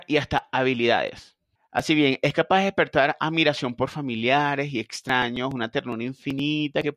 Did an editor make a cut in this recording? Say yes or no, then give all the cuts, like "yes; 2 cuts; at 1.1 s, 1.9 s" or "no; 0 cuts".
yes; 1 cut; at 1.6 s